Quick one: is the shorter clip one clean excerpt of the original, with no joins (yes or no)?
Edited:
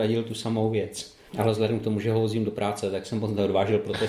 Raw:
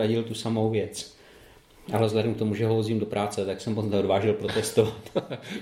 no